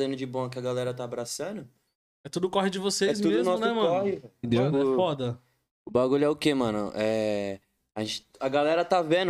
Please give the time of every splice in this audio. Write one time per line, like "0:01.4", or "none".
0:04.4